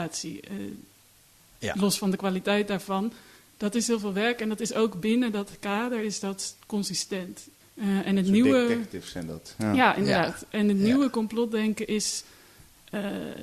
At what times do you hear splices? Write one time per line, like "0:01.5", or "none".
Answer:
0:07.6